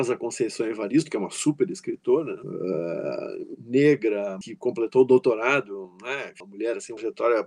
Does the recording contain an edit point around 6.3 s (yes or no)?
no